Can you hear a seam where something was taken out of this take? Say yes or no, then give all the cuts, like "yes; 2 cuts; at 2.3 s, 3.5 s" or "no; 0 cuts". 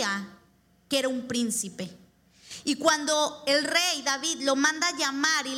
no; 0 cuts